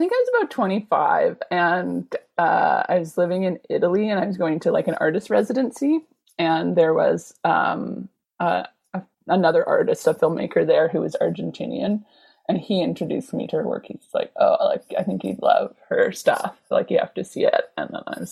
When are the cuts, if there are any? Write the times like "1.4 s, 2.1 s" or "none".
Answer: none